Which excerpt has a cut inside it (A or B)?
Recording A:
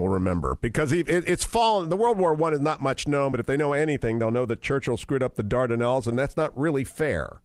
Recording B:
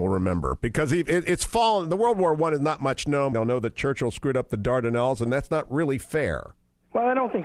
B